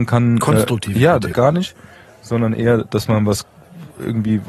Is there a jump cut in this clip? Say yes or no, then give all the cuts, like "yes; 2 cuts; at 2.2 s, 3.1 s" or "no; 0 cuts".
yes; 1 cut; at 1.3 s